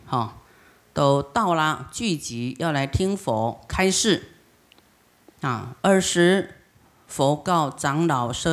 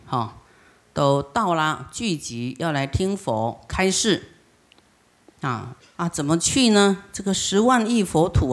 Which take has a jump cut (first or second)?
second